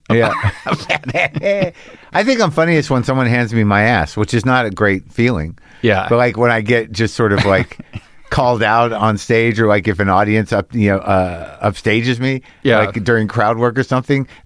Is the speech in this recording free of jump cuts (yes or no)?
yes